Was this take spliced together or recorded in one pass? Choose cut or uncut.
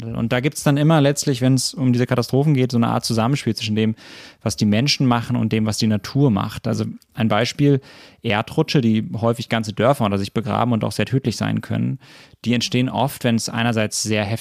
uncut